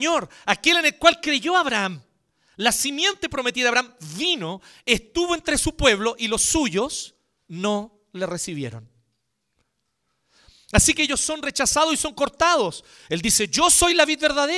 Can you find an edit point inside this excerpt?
yes; 1 cut; at 13.0 s

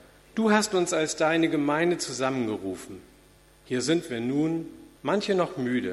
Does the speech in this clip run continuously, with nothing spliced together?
no; 1 cut; at 5.0 s

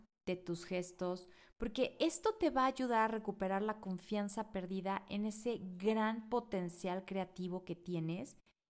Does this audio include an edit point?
no; 0 cuts

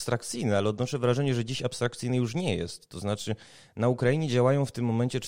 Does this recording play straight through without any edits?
yes; 0 cuts

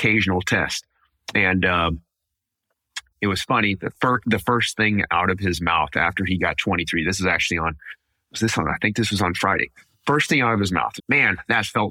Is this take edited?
yes; 2 cuts; at 3.1 s, 11.0 s

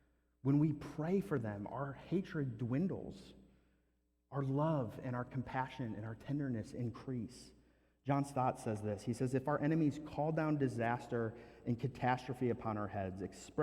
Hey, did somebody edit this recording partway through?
no; 0 cuts

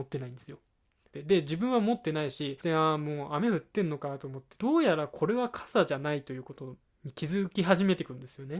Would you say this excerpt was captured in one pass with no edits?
no; 2 cuts; at 1.1 s, 4.6 s

